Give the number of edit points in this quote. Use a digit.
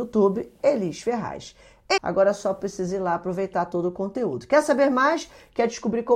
1